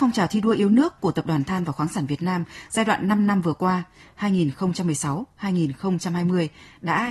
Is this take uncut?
yes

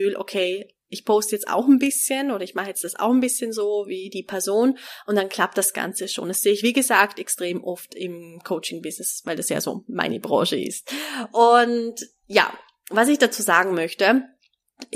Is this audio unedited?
yes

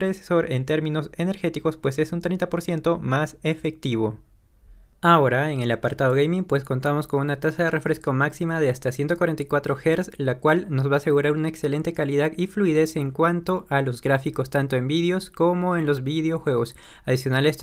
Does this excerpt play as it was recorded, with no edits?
yes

